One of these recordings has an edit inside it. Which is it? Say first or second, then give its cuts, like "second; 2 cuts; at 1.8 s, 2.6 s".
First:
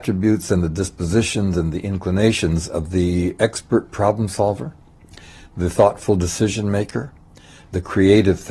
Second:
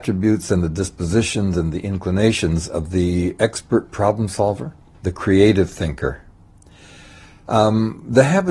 second; 1 cut; at 4.9 s